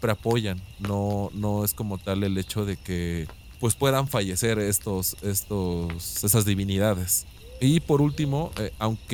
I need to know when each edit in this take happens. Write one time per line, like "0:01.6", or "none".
none